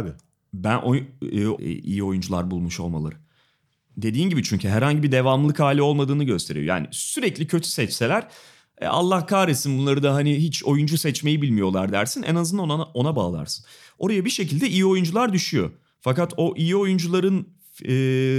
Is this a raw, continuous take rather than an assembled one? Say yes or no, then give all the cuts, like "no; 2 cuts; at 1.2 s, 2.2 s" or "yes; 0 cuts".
no; 1 cut; at 1.6 s